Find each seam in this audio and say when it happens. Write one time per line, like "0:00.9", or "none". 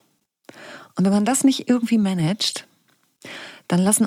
none